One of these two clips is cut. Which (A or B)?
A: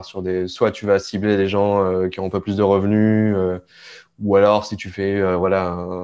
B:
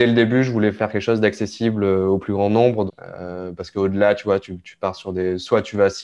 B